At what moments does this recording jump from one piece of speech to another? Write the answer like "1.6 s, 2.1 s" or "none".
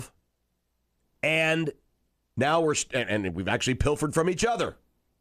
none